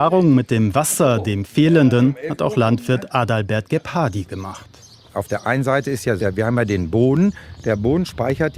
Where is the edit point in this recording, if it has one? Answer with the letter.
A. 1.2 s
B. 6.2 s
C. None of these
B